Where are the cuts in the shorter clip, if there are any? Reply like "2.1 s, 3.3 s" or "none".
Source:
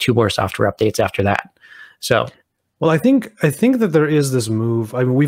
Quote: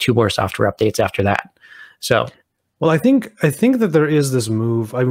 none